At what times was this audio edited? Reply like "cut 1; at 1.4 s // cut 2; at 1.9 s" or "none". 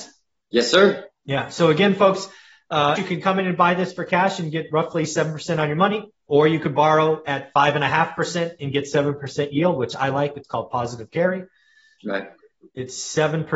cut 1; at 3.0 s // cut 2; at 12.0 s